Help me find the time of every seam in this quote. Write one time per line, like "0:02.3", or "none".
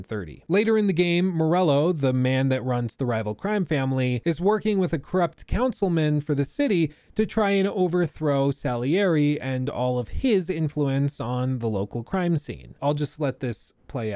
0:12.8